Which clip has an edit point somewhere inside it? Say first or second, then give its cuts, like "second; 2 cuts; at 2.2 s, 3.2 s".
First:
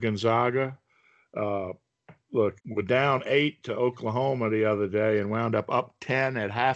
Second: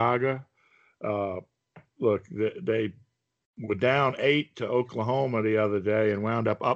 first; 1 cut; at 2.6 s